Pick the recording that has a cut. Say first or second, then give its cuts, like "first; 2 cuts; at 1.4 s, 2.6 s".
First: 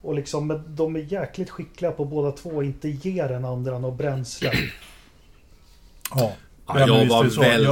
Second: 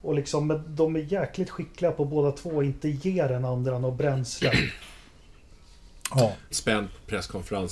second; 1 cut; at 6.5 s